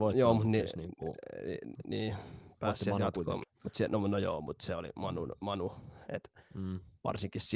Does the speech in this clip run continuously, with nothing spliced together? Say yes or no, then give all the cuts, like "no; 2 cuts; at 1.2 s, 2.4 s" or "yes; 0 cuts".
no; 1 cut; at 3.4 s